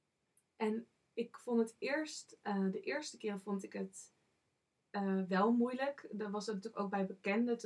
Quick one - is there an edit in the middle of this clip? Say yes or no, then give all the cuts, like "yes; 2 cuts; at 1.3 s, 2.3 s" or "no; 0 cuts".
no; 0 cuts